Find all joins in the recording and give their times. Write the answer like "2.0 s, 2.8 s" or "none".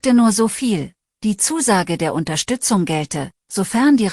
none

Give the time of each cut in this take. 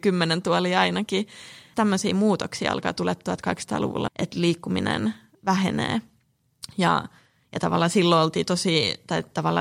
1.7 s, 4.1 s

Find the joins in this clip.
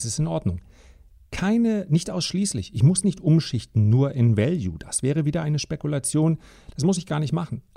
none

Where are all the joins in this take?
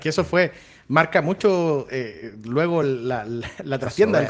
none

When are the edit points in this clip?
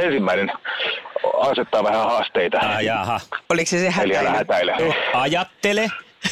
3.5 s, 4.8 s

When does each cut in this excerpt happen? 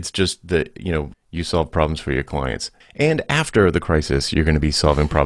1.1 s, 2.8 s

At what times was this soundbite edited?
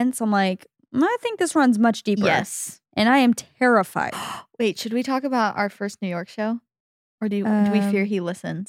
none

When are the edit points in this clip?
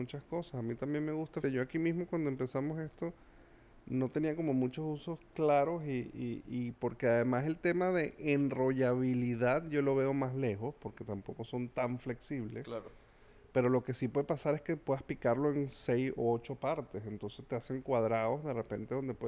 1.4 s

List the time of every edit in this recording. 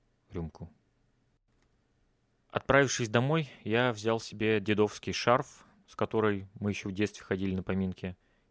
5.8 s

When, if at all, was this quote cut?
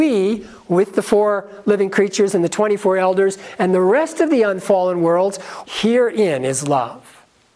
5.6 s

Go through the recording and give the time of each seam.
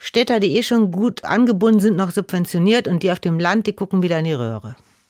none

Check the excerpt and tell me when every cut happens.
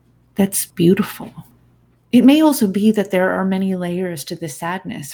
none

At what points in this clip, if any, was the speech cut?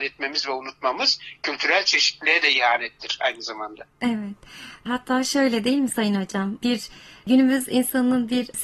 none

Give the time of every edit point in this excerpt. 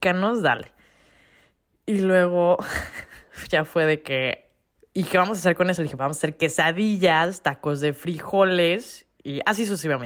4.8 s, 6.0 s

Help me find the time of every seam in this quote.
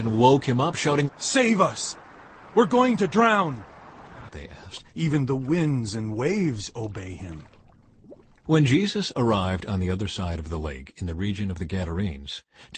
1.1 s, 4.3 s, 8.5 s

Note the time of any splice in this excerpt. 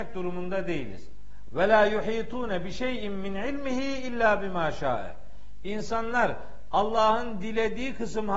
1.5 s

